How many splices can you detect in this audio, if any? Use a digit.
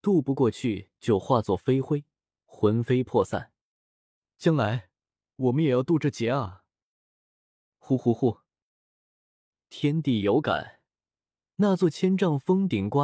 0